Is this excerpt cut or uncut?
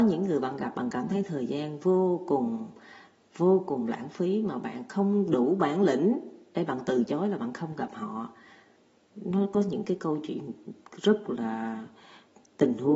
uncut